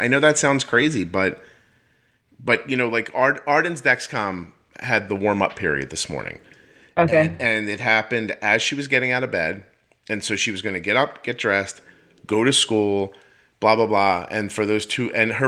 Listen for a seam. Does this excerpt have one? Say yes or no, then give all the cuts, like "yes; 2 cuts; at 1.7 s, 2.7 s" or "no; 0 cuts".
yes; 1 cut; at 5.1 s